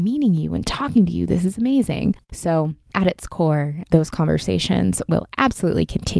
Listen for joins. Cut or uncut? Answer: uncut